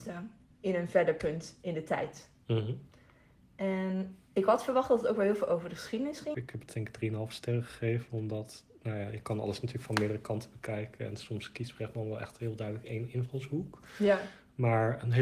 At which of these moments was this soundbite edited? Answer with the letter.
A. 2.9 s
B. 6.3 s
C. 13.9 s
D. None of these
B